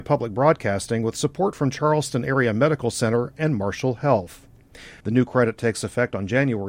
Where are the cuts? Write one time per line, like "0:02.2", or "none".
0:05.0